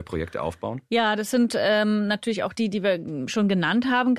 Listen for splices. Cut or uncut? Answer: uncut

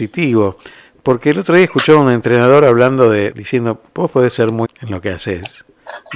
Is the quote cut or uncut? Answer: cut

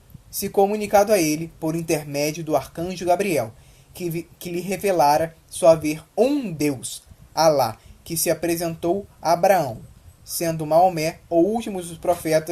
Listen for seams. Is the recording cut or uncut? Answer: uncut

